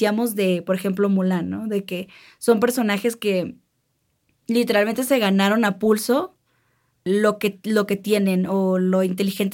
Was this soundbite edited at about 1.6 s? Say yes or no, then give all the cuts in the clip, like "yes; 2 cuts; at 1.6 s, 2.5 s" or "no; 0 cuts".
no; 1 cut; at 7.1 s